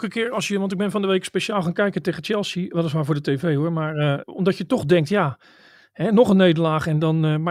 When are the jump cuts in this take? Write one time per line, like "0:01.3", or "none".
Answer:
0:04.2

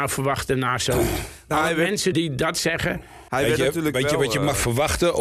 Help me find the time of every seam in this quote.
0:02.1
0:03.3

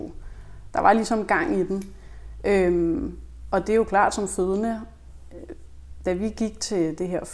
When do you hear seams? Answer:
none

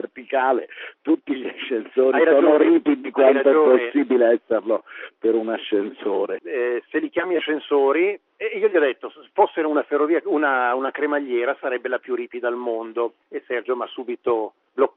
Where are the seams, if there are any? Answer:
0:06.4

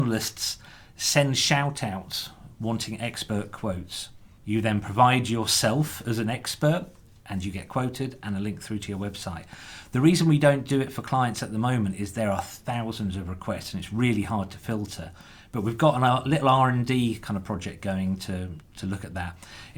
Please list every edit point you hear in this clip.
0:04.4
0:18.6

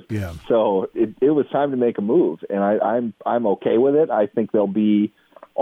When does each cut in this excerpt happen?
0:00.9

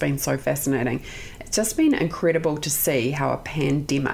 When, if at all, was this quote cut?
none

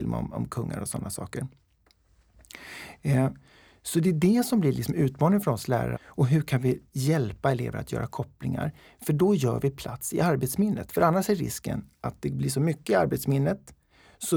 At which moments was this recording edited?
0:05.9

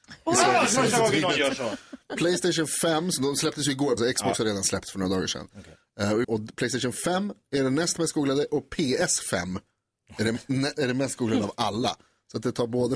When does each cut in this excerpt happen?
0:04.0
0:06.2

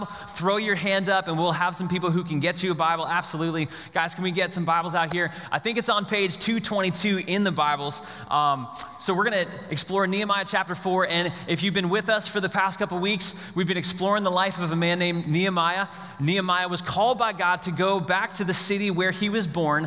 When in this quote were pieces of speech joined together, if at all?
none

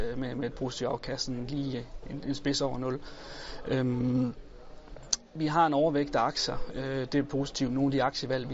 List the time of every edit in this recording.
none

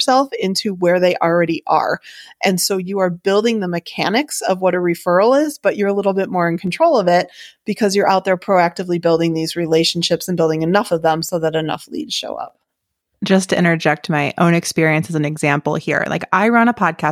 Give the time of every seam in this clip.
none

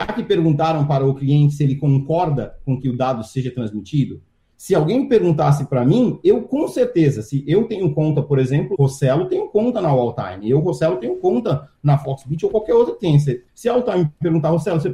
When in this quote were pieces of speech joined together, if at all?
0:08.7
0:13.5

